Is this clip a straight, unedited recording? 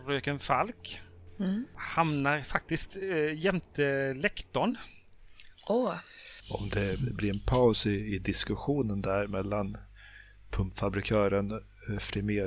no; 1 cut; at 6.4 s

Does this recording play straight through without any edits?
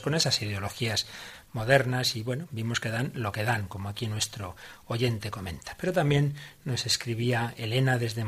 yes; 0 cuts

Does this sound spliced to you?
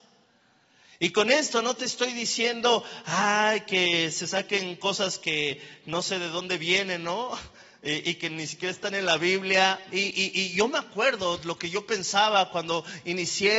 yes; 1 cut; at 9.9 s

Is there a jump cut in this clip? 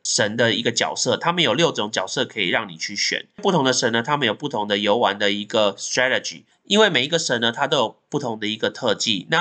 no; 0 cuts

